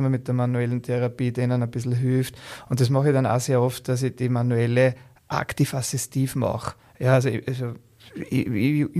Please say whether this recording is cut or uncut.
uncut